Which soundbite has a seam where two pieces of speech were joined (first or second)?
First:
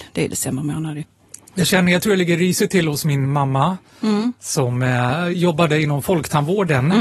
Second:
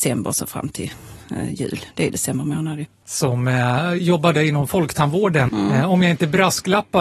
second